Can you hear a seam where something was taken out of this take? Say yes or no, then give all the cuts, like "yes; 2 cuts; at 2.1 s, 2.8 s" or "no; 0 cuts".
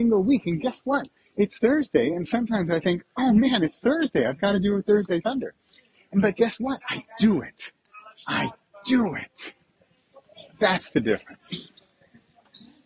no; 0 cuts